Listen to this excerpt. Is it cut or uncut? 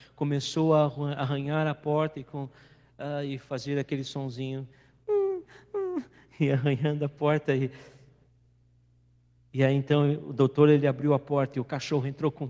uncut